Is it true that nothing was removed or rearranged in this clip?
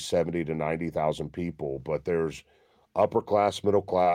yes; 0 cuts

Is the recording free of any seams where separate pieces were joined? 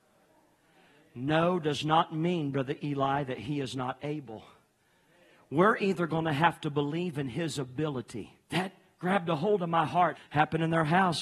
no; 2 cuts; at 8.4 s, 10.2 s

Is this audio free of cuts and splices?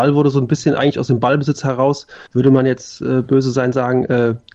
no; 1 cut; at 2.3 s

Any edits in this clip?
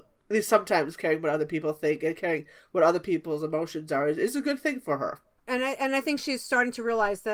no; 0 cuts

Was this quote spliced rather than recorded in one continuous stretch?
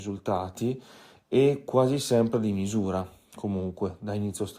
no; 0 cuts

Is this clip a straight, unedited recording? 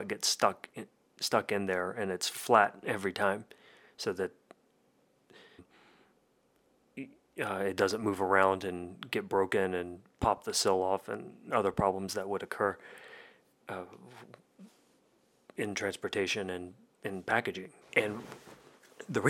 no; 2 cuts; at 5.6 s, 17.8 s

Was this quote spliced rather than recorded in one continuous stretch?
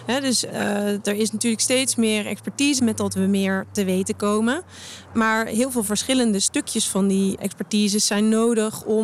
yes; 1 cut; at 2.8 s

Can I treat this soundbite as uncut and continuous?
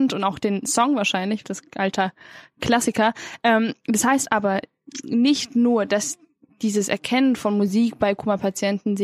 no; 1 cut; at 1.4 s

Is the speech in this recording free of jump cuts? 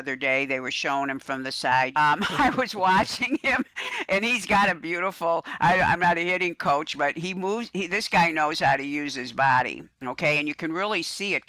no; 1 cut; at 1.9 s

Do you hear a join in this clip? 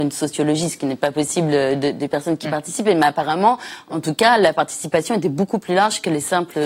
no; 0 cuts

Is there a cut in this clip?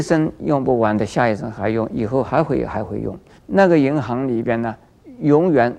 yes; 1 cut; at 3.4 s

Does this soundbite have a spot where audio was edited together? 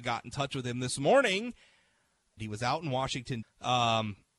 yes; 2 cuts; at 2.4 s, 3.4 s

